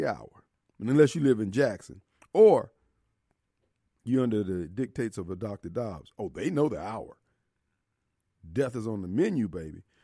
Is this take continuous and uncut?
no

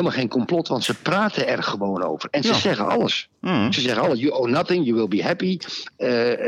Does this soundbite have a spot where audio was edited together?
no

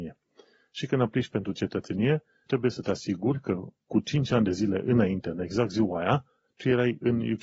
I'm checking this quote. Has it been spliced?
yes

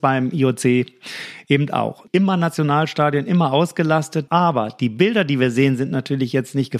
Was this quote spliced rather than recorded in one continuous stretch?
yes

